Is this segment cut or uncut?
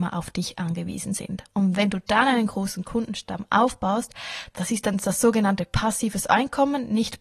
cut